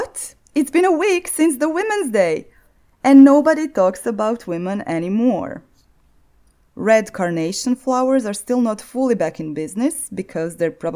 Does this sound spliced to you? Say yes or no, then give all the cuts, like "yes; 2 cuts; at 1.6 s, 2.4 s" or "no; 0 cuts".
yes; 1 cut; at 6.7 s